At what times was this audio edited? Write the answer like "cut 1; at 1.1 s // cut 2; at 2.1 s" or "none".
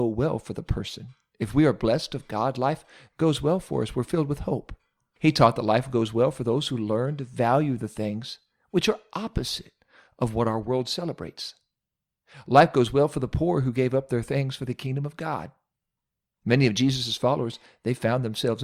cut 1; at 5.2 s